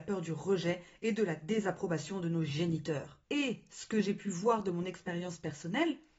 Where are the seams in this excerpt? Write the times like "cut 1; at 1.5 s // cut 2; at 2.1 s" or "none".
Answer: none